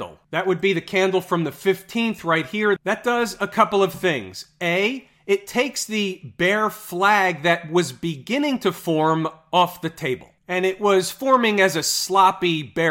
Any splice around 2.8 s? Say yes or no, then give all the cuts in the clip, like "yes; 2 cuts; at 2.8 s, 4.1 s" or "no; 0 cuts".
yes; 1 cut; at 2.8 s